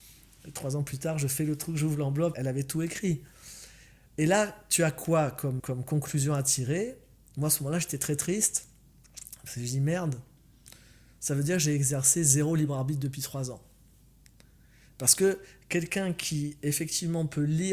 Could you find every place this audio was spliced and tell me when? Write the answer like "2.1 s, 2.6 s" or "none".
2.3 s, 5.6 s

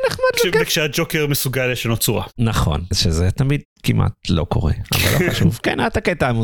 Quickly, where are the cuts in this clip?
none

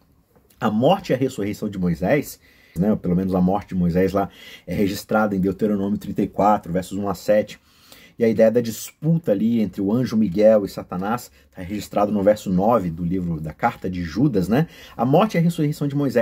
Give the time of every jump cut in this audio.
2.8 s

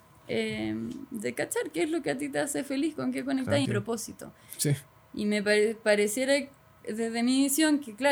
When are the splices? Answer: 3.6 s

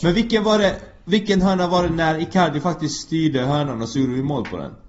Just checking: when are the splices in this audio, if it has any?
none

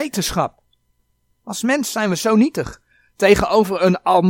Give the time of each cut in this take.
1.4 s

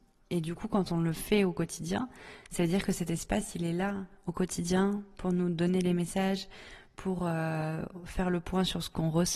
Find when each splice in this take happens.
none

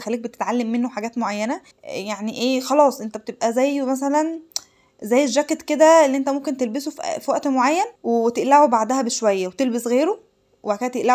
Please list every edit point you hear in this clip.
1.7 s, 7.9 s

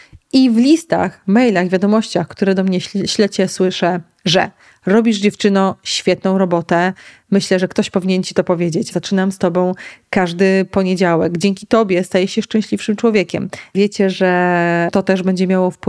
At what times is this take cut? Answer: 8.9 s, 13.7 s

